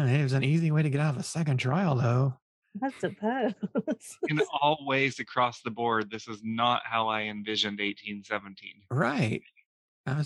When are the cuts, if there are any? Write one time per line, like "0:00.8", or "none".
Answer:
none